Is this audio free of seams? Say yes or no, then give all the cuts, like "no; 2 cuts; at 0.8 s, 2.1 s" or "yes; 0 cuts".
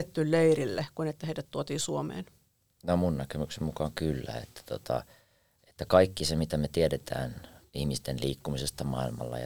yes; 0 cuts